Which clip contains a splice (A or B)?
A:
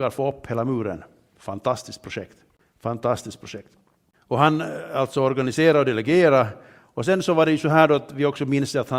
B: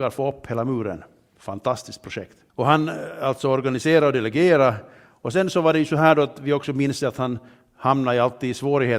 B